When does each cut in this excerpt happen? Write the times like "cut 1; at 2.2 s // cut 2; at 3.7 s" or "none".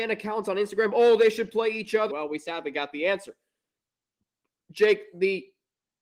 cut 1; at 2.1 s